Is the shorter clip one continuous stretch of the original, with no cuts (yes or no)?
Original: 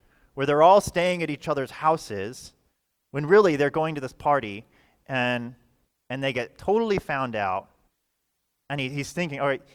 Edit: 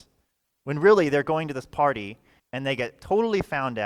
no